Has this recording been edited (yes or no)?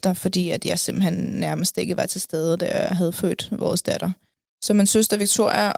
no